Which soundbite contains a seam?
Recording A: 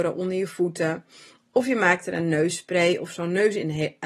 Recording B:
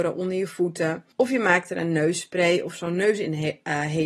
B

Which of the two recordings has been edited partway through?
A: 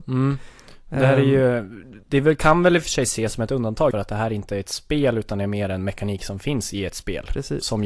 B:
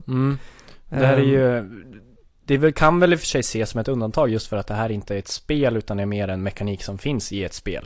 A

